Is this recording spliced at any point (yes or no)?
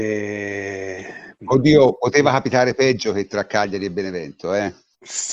no